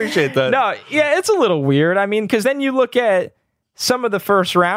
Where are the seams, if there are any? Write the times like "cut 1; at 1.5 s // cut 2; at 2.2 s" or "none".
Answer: none